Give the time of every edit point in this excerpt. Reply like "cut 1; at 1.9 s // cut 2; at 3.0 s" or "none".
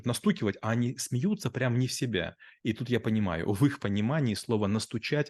none